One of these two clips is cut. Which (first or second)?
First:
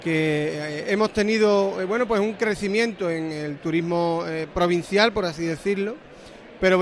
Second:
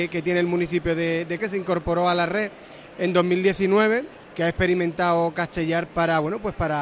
second